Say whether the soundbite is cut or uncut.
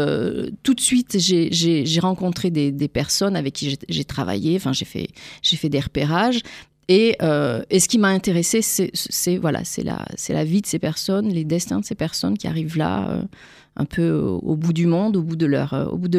uncut